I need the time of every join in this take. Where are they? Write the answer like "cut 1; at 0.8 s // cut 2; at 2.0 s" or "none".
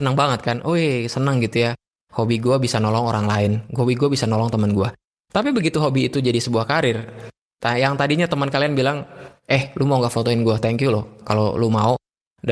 none